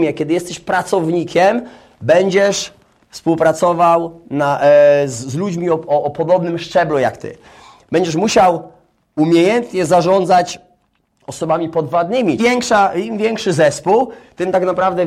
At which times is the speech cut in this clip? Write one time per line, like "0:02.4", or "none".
0:12.4